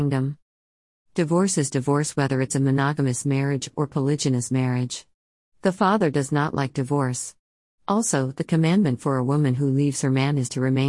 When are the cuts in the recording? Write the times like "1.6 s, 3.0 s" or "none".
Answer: none